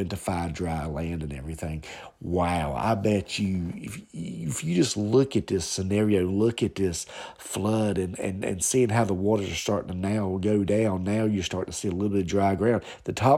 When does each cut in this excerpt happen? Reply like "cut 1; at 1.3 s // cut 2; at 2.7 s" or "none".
none